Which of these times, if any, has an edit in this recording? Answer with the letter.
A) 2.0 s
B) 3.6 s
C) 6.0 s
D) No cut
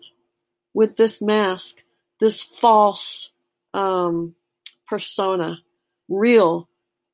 C